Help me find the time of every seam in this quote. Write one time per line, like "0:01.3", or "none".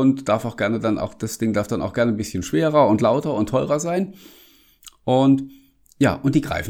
none